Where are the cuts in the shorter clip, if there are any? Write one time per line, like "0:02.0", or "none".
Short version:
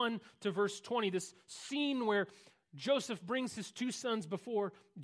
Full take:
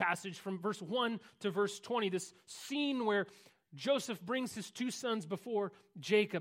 none